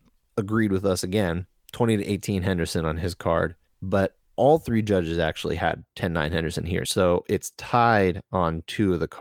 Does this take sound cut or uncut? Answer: uncut